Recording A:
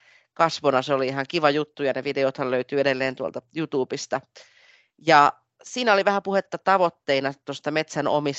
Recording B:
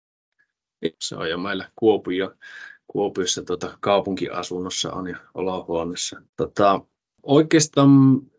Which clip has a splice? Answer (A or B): B